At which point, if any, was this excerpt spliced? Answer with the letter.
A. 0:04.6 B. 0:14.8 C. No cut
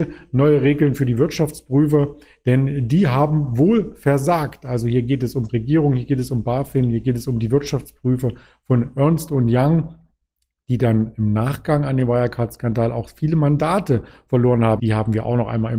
B